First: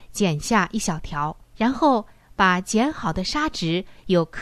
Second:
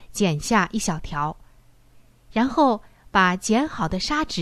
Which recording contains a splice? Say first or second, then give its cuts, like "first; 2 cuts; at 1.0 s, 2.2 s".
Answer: first; 1 cut; at 1.4 s